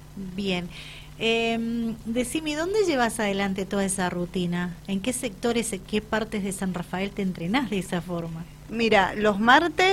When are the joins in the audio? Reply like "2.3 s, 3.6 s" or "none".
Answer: none